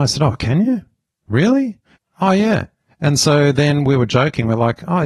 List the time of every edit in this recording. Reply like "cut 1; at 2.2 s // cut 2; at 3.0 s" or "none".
none